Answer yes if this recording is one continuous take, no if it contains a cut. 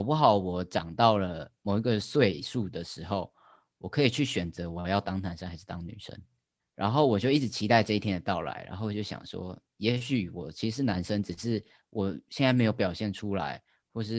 no